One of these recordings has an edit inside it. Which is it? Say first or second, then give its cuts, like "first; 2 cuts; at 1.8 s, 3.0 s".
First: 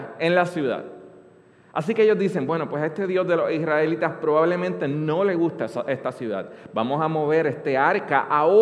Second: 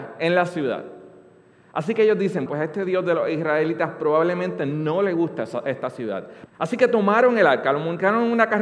second; 2 cuts; at 2.5 s, 6.5 s